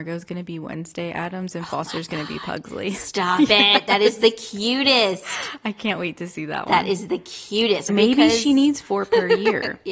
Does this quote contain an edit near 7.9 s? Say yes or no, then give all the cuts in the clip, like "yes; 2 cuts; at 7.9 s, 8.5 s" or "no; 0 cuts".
yes; 1 cut; at 7.9 s